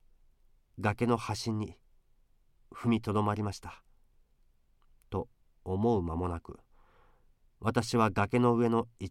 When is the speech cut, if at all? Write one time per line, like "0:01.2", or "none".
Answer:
none